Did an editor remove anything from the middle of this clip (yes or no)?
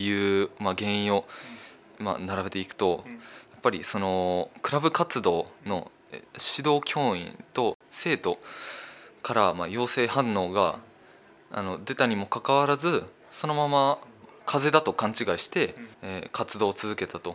yes